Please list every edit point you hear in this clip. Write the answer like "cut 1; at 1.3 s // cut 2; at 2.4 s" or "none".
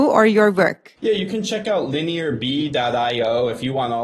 cut 1; at 1.0 s